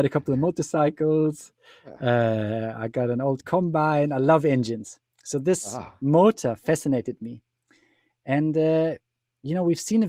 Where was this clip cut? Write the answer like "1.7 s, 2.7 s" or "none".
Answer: none